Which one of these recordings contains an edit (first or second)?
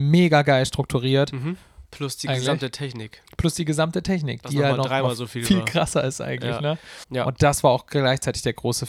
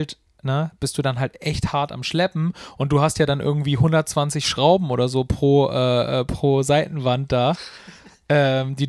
first